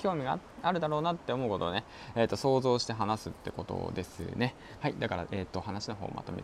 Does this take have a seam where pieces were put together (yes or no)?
yes